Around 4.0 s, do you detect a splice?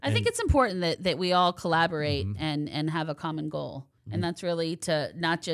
yes; 1 cut; at 4.0 s

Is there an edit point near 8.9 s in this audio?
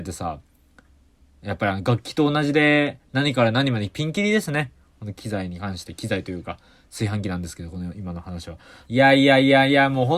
yes; 1 cut; at 8.9 s

